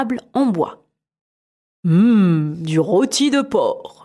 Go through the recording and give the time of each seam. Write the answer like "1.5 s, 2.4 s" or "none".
1.7 s